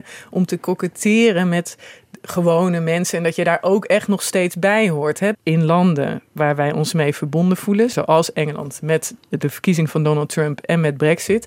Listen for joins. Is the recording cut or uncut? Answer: cut